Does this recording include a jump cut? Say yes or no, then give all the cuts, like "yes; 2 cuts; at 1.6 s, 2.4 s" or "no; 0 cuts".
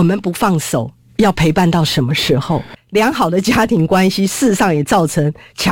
yes; 1 cut; at 2.8 s